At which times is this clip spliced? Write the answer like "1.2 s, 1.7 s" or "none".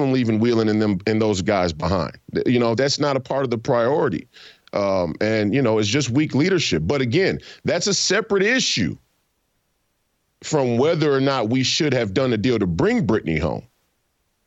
2.7 s